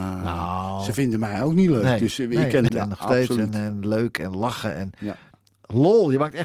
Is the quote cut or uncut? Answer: cut